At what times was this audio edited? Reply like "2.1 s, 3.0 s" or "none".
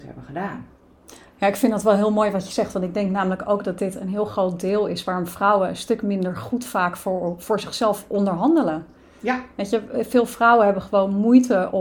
none